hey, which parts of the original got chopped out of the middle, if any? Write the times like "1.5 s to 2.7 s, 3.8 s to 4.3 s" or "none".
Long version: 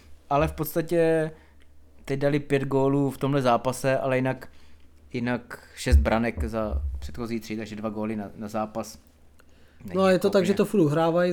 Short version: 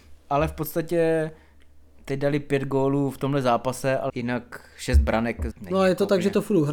4.1 s to 5.1 s, 6.5 s to 9.7 s